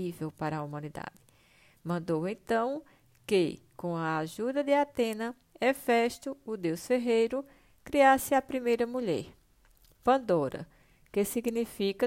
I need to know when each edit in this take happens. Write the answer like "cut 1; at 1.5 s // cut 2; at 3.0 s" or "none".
none